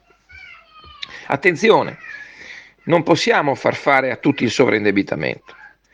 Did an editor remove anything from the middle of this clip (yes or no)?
no